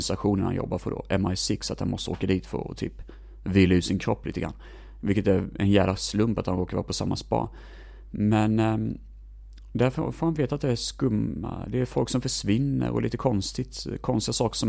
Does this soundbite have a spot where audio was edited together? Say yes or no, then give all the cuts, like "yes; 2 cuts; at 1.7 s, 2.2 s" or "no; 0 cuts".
no; 0 cuts